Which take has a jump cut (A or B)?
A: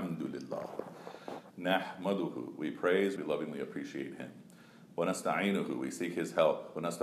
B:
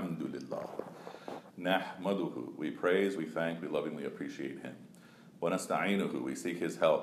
A